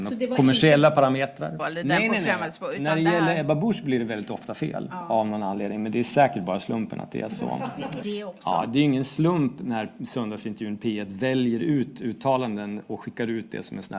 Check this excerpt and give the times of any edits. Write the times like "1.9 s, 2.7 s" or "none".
1.6 s, 8.0 s